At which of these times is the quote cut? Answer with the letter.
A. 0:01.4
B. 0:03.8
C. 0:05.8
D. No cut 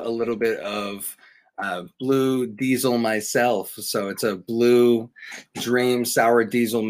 D